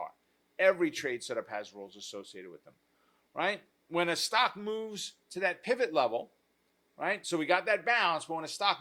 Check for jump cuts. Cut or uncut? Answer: uncut